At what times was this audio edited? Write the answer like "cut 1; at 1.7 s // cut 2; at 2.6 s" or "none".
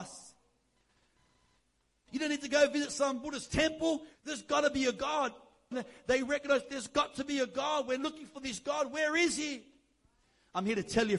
cut 1; at 2.1 s // cut 2; at 4.2 s // cut 3; at 5.7 s